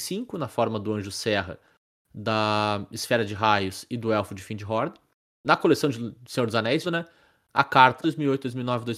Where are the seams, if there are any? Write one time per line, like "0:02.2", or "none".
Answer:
0:05.3
0:06.8
0:08.0

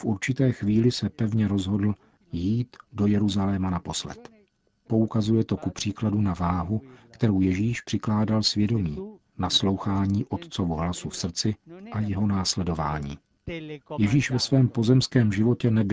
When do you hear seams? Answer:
0:04.9

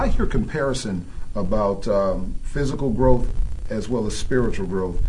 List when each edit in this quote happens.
none

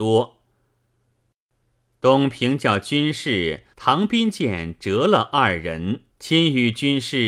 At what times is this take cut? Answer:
0:03.7
0:06.1

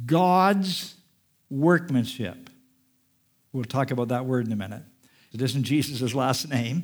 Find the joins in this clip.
0:05.3

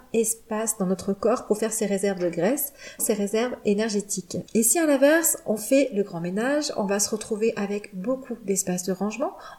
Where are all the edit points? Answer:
0:03.0
0:04.5

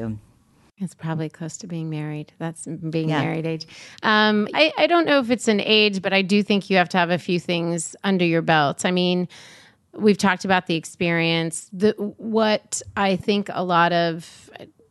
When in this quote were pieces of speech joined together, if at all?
0:04.5

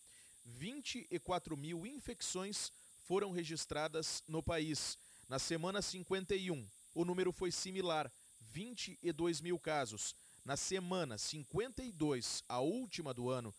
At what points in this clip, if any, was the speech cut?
0:06.9

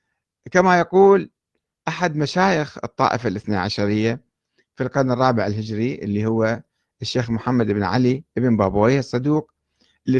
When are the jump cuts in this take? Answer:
none

